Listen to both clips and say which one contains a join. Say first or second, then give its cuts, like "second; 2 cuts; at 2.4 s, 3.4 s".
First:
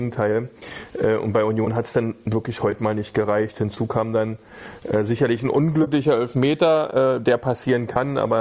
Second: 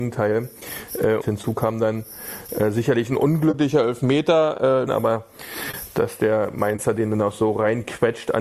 second; 2 cuts; at 1.2 s, 4.9 s